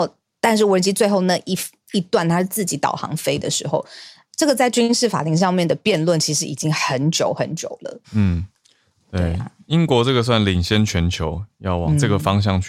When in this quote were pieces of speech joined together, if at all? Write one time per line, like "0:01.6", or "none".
0:08.0

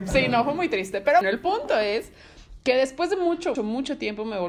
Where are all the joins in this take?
0:01.2
0:03.6

